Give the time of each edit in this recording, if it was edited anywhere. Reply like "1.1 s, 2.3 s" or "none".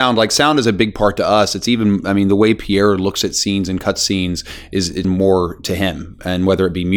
5.0 s